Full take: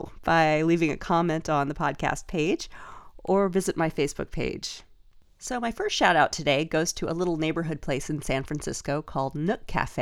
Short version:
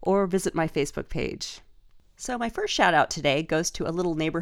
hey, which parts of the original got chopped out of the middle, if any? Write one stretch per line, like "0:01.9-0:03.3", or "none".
none